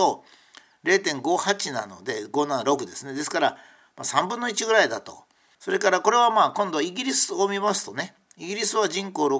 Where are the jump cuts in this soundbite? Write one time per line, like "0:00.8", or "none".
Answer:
0:05.5

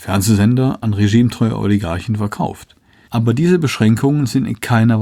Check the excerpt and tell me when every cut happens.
0:03.1

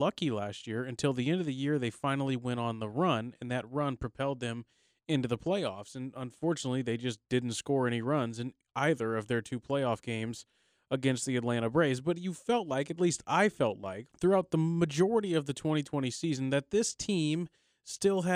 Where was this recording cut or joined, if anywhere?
0:14.1

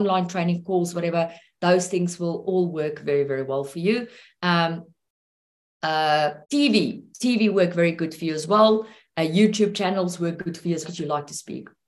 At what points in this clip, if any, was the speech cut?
0:06.4
0:10.8

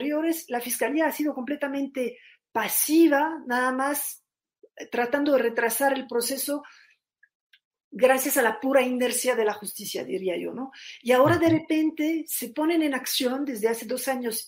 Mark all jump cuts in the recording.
none

